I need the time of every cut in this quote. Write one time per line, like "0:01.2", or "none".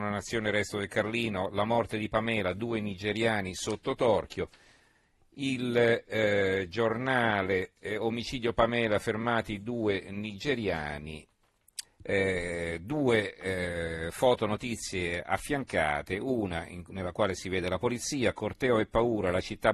0:11.8

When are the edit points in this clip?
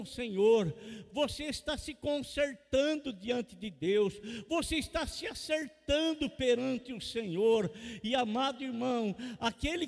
none

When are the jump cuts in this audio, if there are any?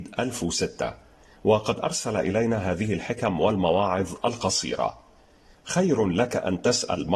none

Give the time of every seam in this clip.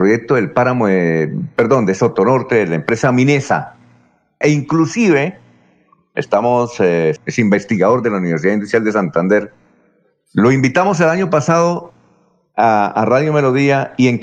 0:04.4
0:07.2

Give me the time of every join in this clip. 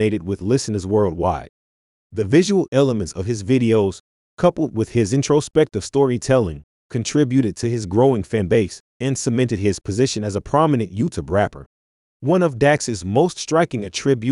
none

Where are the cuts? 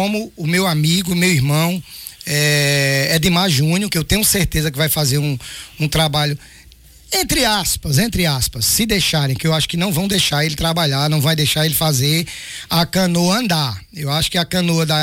none

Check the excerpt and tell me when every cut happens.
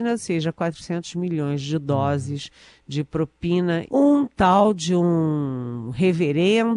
0:03.9

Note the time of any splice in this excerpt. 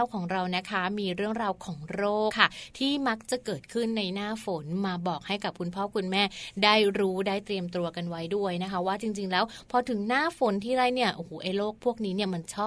0:02.3

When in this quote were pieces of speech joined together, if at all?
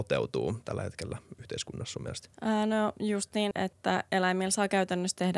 0:02.3
0:03.5

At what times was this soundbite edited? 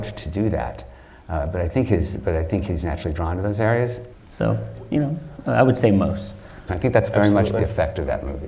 0:04.1
0:06.7

